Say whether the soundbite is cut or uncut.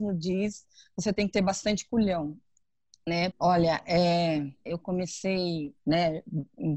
cut